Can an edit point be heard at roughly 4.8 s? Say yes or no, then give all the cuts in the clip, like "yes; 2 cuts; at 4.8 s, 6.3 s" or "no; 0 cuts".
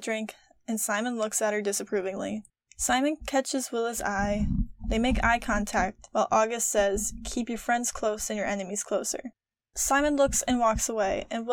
no; 0 cuts